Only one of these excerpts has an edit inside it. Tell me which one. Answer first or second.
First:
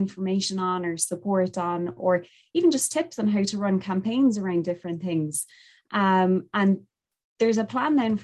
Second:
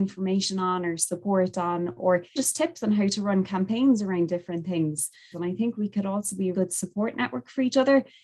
second